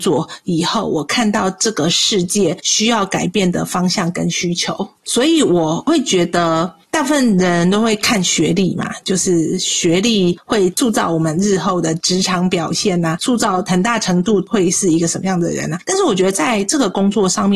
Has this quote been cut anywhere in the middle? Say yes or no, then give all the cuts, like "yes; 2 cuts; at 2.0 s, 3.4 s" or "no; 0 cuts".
no; 0 cuts